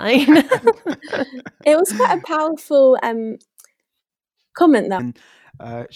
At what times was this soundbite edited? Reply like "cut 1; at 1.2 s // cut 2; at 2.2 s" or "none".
cut 1; at 5.0 s